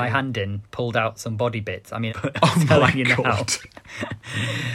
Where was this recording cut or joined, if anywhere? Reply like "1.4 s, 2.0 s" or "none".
2.1 s